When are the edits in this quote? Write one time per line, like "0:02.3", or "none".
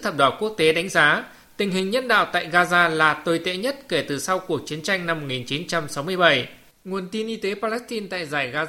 0:06.7